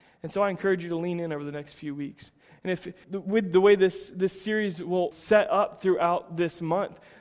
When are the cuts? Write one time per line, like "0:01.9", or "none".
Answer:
0:03.0
0:05.1